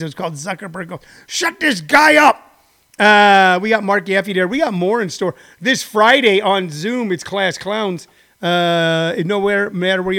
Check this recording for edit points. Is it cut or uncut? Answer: uncut